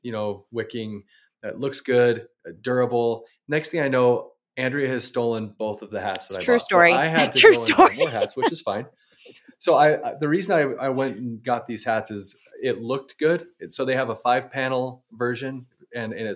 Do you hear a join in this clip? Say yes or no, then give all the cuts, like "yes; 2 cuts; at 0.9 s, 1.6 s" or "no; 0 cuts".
no; 0 cuts